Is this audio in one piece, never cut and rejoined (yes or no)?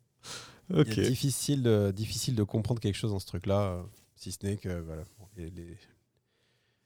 yes